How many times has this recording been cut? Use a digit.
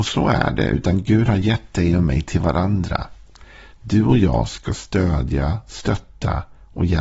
0